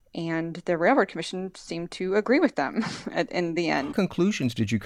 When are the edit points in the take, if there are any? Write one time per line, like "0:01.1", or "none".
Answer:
0:03.9